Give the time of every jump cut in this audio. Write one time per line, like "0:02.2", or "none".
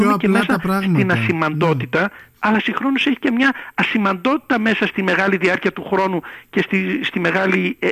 0:02.4